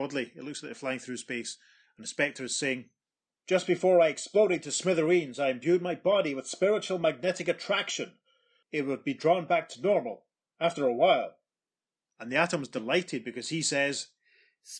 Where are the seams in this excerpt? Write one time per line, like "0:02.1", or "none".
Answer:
0:08.6